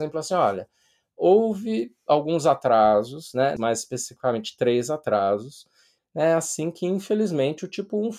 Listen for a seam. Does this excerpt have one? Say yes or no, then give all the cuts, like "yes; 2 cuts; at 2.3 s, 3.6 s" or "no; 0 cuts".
yes; 2 cuts; at 3.6 s, 6.0 s